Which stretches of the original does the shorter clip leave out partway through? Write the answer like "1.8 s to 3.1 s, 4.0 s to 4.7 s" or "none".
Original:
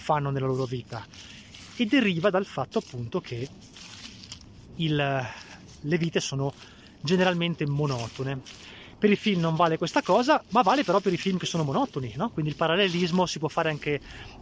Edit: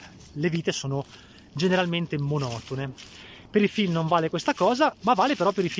none